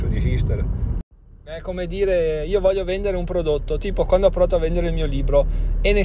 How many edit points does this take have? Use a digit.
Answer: 0